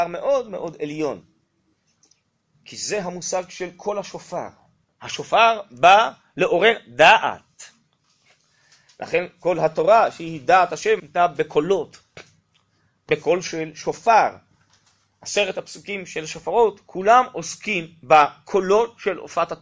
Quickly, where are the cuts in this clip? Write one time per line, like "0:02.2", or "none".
0:02.5
0:11.0